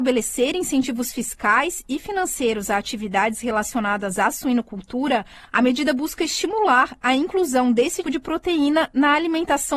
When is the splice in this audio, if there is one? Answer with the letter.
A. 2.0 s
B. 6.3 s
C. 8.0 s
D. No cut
C